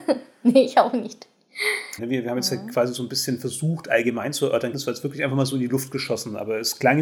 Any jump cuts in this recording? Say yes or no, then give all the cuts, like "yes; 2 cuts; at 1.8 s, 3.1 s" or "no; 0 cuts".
yes; 2 cuts; at 2.0 s, 4.7 s